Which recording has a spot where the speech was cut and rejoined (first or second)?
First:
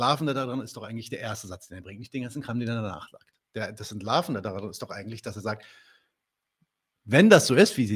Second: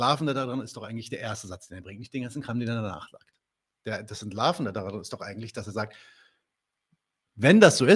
first